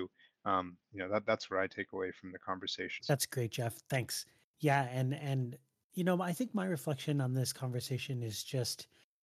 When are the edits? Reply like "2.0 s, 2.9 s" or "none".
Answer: 3.0 s

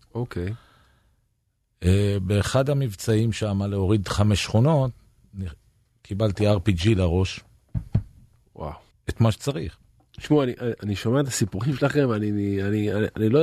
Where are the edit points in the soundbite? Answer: 8.9 s

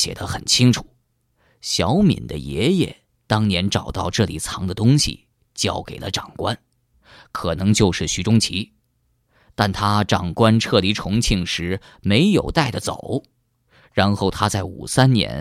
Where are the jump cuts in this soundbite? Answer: none

